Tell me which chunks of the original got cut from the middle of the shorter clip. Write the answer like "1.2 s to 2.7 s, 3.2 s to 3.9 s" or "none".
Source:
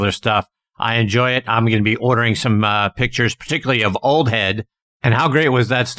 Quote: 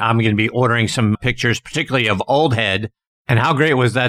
2.6 s to 2.9 s